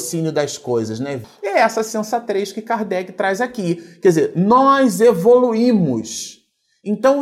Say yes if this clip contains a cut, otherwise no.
no